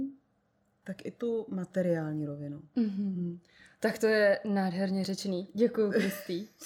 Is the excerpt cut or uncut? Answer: uncut